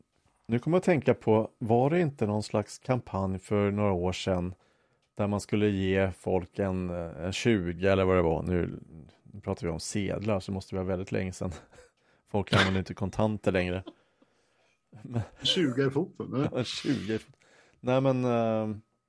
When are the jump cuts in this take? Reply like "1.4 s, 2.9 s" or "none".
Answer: none